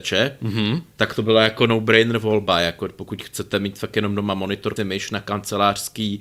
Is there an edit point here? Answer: yes; 2 cuts; at 0.9 s, 4.8 s

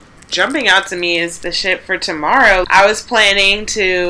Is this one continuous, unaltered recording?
yes; 0 cuts

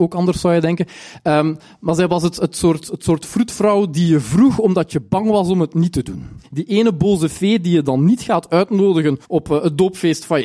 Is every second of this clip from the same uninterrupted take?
no; 2 cuts; at 6.4 s, 9.2 s

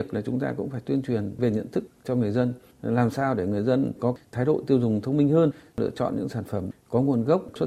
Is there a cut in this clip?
no; 0 cuts

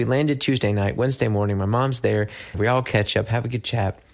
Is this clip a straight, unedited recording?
no; 1 cut; at 2.5 s

